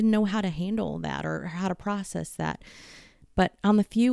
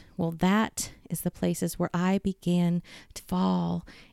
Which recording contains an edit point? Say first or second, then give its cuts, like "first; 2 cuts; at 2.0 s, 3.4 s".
second; 1 cut; at 3.2 s